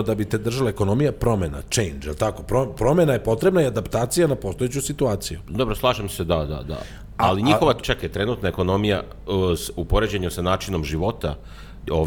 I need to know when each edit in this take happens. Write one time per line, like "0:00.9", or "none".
none